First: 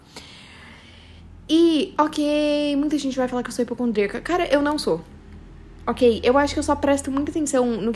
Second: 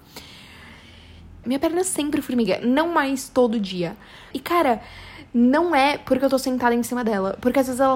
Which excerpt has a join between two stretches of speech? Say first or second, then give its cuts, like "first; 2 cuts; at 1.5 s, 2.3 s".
second; 2 cuts; at 1.4 s, 4.3 s